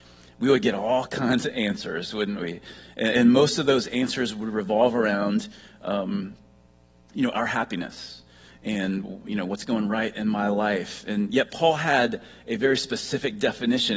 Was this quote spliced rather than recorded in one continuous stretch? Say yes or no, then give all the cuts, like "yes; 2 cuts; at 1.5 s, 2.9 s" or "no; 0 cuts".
no; 0 cuts